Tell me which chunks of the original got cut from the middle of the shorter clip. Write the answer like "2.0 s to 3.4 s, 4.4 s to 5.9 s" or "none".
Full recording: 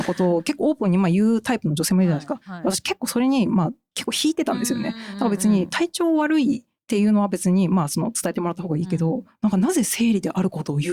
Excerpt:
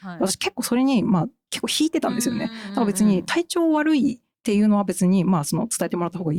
none